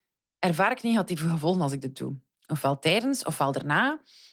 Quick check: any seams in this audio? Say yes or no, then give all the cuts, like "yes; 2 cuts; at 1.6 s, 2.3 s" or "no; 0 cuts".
no; 0 cuts